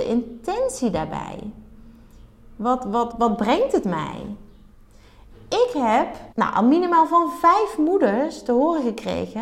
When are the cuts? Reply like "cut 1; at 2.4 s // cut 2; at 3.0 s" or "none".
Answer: cut 1; at 3.1 s // cut 2; at 6.3 s